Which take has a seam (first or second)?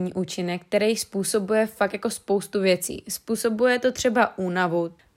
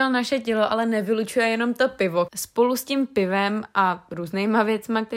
second